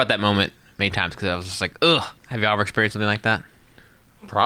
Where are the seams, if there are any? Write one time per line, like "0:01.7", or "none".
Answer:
0:02.2